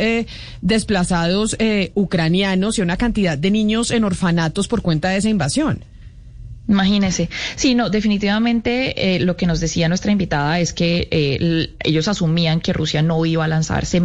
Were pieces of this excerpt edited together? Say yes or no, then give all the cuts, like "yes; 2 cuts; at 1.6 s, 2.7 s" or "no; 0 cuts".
no; 0 cuts